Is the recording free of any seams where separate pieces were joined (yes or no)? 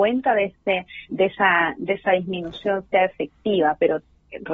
no